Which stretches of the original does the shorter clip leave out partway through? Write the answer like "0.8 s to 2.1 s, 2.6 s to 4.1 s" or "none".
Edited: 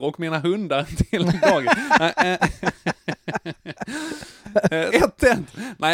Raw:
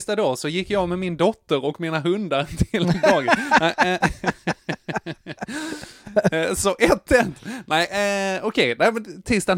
6.5 s to 6.8 s

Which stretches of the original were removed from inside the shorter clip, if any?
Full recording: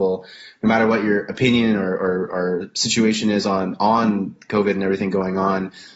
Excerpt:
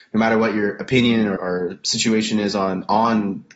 1.9 s to 2.3 s

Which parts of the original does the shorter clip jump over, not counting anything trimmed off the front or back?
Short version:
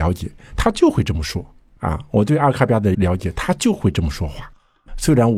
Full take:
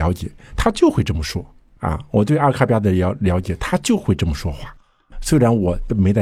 2.9 s to 3.2 s

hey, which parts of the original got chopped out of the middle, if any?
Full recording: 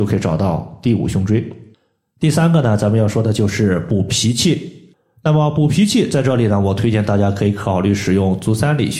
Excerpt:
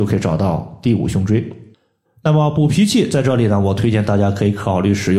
2.0 s to 5.0 s

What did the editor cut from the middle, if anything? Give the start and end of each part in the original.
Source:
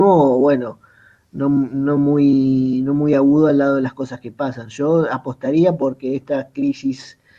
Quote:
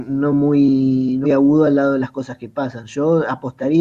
2.9 s to 3.1 s

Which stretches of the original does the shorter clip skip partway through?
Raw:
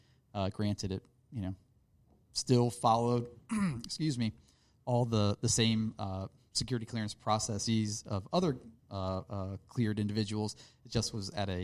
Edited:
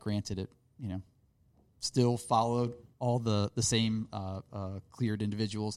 3.5 s to 4.8 s, 6.3 s to 9.3 s

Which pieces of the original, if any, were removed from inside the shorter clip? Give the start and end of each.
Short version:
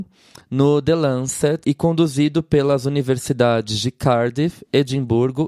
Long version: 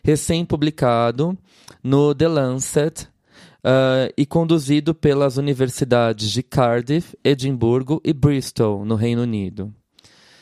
3.0 s to 4.1 s

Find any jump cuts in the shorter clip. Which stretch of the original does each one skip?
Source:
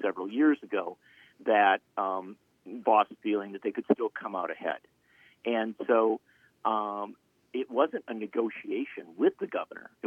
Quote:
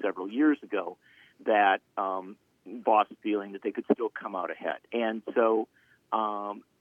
4.9 s to 5.4 s

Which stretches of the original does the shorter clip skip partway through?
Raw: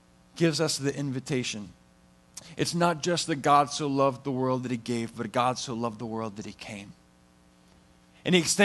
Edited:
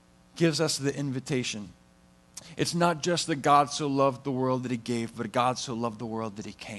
none

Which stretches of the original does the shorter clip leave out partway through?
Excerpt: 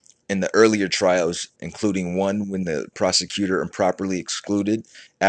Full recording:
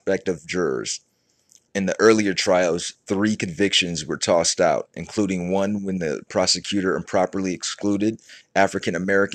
3.0 s to 4.9 s

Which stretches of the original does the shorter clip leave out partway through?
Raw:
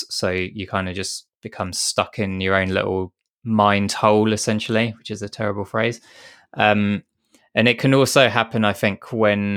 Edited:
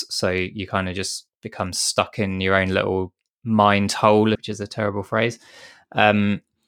4.3 s to 5.0 s

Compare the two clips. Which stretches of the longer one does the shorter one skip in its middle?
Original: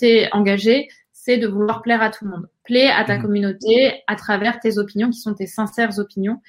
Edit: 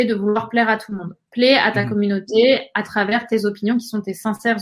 none

